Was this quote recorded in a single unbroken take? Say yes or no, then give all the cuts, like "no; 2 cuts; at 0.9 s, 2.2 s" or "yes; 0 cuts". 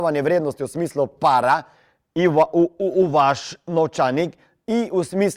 yes; 0 cuts